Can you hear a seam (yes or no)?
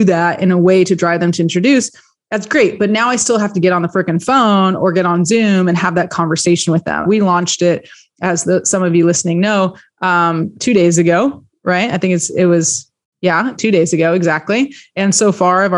yes